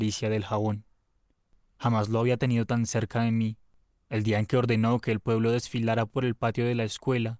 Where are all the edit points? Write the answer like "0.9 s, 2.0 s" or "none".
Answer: none